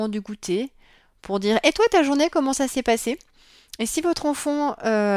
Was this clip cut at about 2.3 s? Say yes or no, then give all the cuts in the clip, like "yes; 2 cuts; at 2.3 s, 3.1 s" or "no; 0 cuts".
no; 0 cuts